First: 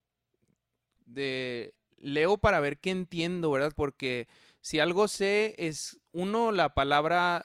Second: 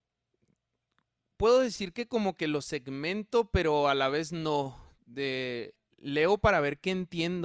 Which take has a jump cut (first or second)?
first